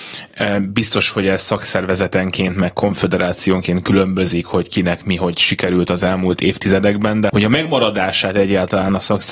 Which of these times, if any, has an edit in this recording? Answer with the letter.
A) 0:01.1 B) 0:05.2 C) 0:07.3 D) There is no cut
C